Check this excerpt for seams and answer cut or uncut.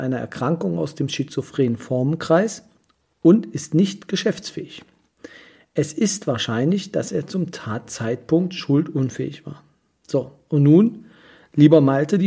uncut